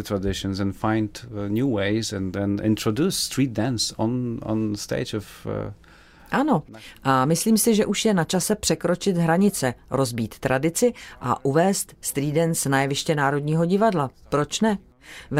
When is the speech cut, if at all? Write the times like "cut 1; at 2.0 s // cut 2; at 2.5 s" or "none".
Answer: cut 1; at 2.3 s